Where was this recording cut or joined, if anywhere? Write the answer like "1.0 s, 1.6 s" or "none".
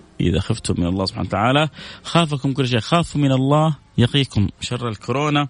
3.9 s